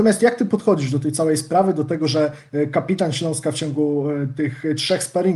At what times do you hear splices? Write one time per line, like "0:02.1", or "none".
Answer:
none